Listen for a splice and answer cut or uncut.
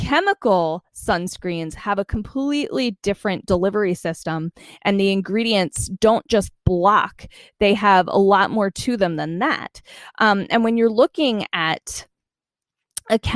uncut